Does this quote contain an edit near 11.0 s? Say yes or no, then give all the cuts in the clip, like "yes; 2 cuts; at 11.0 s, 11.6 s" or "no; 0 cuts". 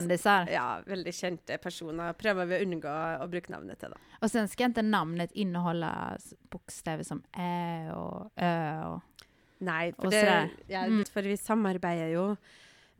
yes; 1 cut; at 11.0 s